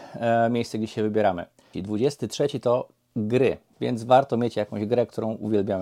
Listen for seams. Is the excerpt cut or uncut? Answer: cut